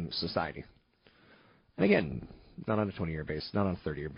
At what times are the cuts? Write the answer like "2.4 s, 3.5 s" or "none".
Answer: 2.6 s

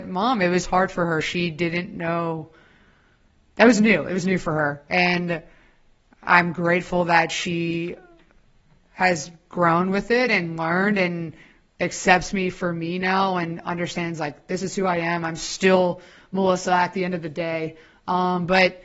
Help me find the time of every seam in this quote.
none

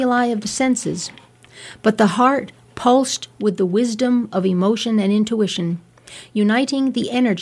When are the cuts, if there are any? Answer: none

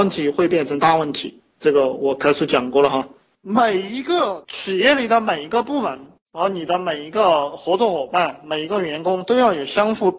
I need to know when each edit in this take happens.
none

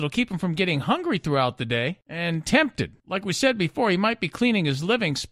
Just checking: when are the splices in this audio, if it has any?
3.0 s

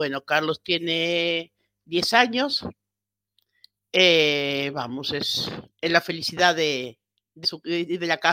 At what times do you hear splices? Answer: 7.4 s

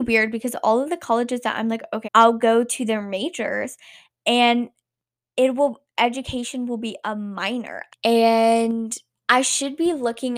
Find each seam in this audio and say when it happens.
2.0 s, 7.9 s

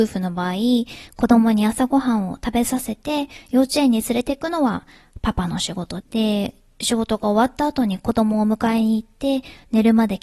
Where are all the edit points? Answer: 6.0 s

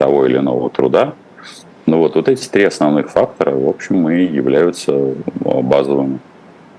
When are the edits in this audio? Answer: none

